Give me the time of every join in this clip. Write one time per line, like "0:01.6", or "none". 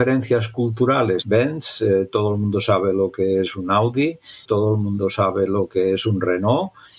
0:01.2
0:04.5